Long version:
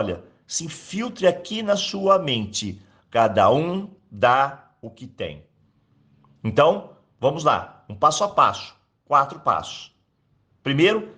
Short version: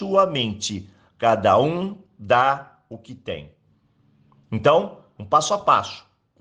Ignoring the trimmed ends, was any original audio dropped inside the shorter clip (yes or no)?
yes